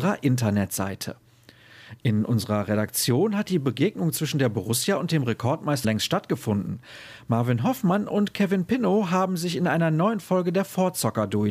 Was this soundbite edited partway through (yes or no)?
yes